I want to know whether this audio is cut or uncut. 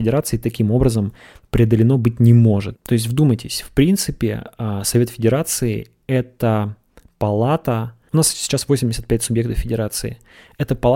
cut